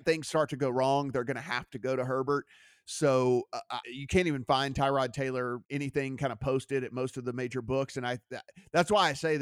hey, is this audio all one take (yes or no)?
no